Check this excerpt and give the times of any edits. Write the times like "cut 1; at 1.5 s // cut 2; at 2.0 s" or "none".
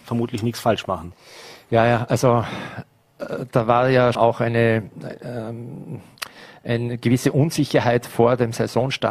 cut 1; at 4.1 s